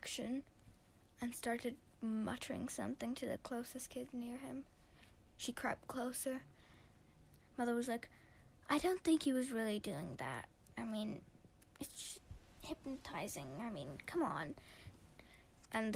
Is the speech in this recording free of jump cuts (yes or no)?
no